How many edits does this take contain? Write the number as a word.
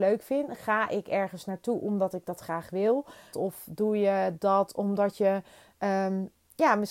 one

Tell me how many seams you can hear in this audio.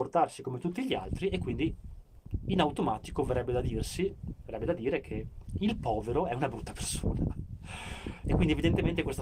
one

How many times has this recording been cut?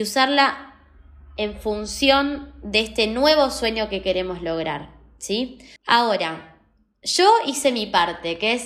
one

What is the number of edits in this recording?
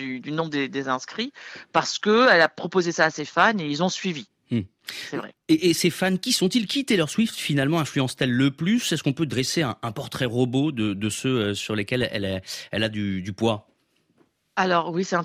zero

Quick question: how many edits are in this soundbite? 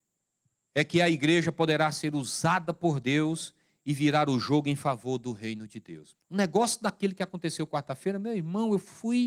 one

